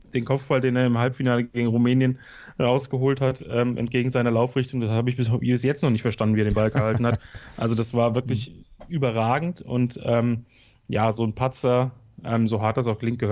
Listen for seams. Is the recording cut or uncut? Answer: uncut